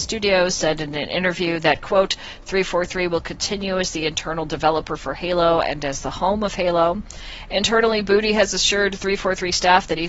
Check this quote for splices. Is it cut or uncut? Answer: uncut